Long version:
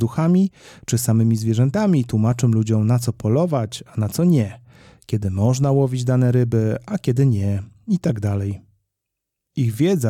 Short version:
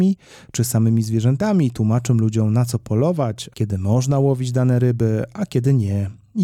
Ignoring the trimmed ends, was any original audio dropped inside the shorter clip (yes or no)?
yes